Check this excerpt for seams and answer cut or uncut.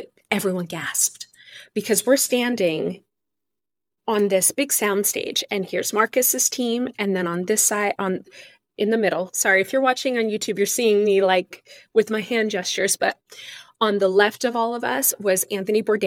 uncut